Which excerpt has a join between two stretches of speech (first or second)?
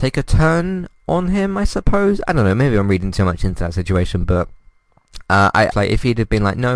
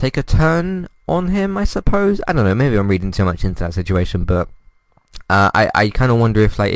first